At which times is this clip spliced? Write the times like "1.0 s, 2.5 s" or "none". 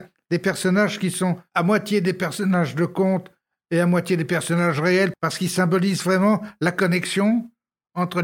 5.1 s

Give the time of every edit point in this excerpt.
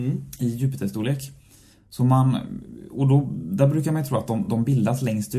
none

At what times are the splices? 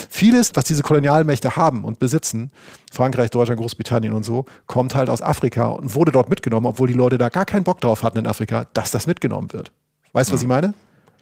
none

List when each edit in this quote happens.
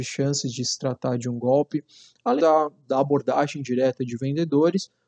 2.4 s

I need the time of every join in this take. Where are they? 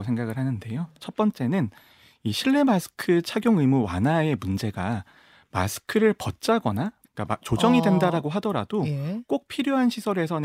7.0 s

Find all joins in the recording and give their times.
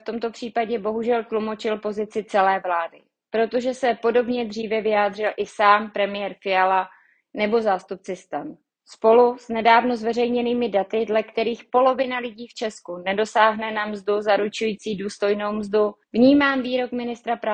none

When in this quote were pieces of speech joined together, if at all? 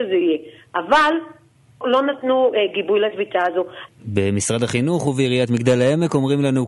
1.8 s, 3.9 s

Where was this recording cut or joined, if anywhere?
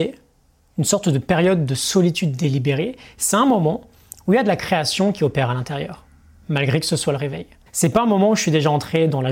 7.7 s

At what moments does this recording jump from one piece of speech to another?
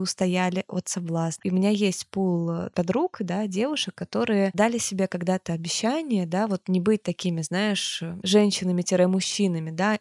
1.4 s

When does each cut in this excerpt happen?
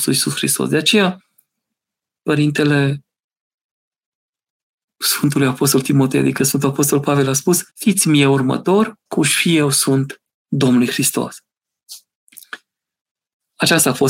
7.7 s, 9.1 s

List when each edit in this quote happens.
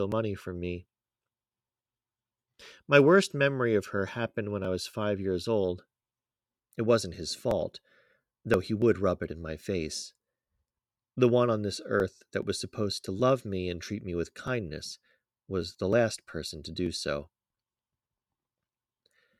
6.6 s, 11.0 s

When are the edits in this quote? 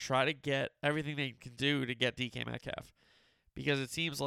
none

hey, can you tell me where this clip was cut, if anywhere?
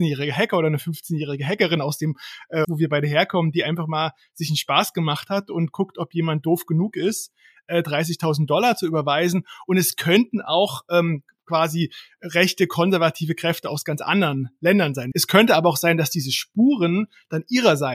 2.6 s, 15.1 s

